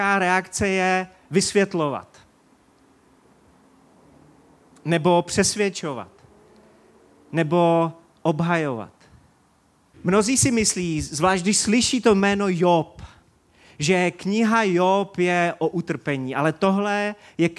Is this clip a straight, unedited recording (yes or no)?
no